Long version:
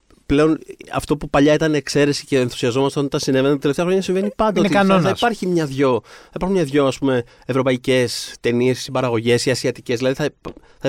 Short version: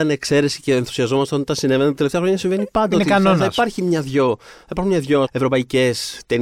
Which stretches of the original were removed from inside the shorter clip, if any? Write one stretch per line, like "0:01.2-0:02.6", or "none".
0:06.9-0:07.4